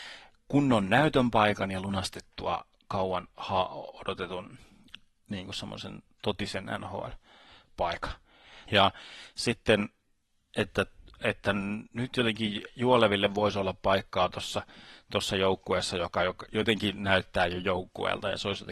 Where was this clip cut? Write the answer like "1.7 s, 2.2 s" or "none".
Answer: 8.7 s

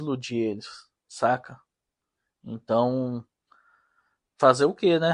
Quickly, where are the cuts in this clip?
1.0 s

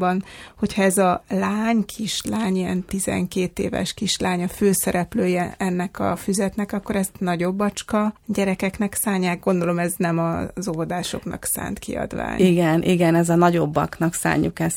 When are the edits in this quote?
8.2 s

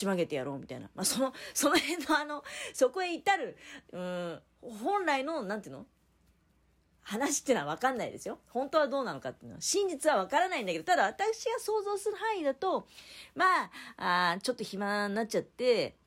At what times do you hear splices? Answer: none

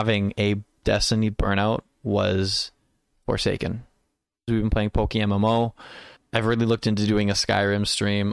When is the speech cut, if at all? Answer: 4.5 s, 6.2 s

